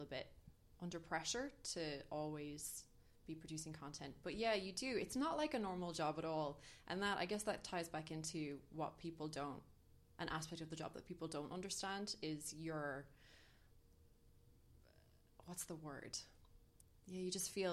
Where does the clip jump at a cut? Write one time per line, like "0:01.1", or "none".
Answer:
none

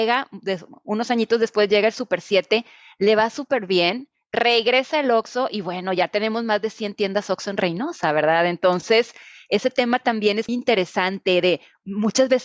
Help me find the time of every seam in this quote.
0:10.5

